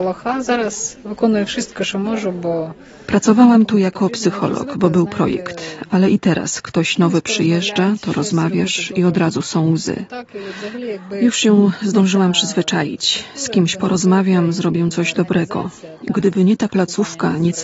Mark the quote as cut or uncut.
uncut